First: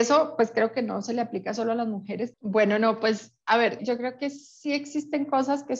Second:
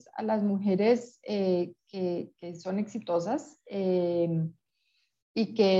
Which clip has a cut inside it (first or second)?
first